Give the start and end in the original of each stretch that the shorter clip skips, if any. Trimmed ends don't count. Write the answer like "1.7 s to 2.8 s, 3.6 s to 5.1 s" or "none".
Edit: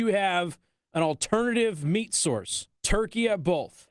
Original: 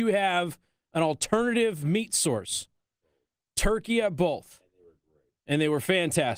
2.7 s to 3.5 s